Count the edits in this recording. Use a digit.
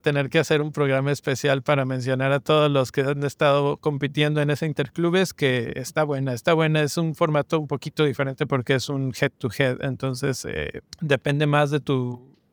0